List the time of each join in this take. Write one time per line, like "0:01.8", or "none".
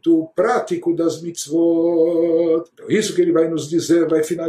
0:02.7